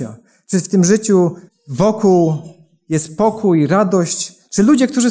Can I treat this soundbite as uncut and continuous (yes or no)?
no